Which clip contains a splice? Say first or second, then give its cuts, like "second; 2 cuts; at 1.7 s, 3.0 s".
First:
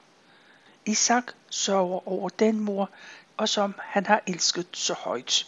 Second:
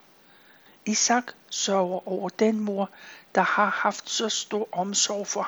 first; 1 cut; at 3.3 s